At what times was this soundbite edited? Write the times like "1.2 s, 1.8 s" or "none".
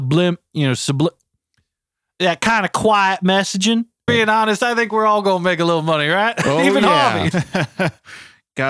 4.1 s, 7.3 s

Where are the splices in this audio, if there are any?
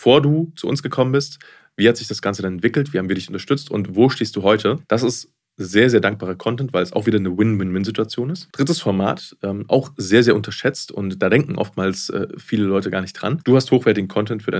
8.5 s, 13.4 s

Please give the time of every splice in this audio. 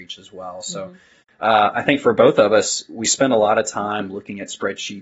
none

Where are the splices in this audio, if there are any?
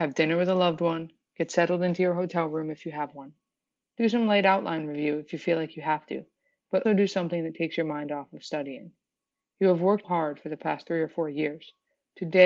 6.8 s, 10.0 s

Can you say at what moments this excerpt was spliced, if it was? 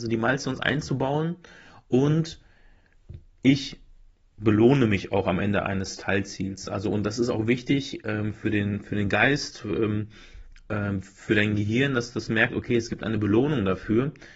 none

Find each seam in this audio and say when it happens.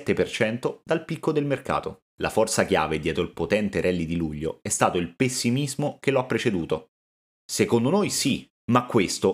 7.3 s

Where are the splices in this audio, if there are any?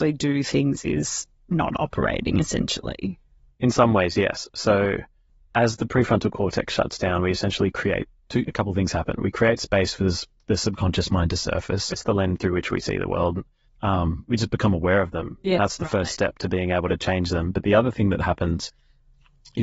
11.9 s, 13.6 s

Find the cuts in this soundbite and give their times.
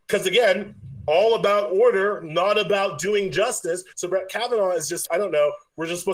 3.9 s, 5.1 s

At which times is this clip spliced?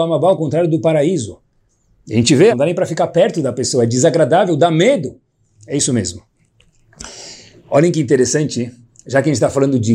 2.5 s

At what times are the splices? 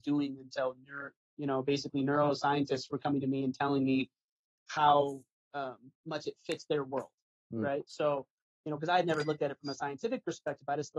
none

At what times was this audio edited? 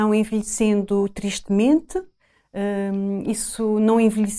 none

